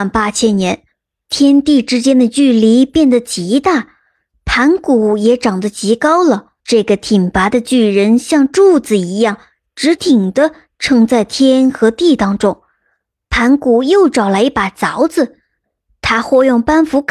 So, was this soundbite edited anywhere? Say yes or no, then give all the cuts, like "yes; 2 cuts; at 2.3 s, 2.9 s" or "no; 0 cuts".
yes; 3 cuts; at 6.6 s, 10.0 s, 13.2 s